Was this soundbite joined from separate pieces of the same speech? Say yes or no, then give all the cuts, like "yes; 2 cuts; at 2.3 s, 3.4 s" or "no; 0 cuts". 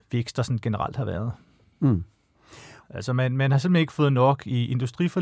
yes; 1 cut; at 2.8 s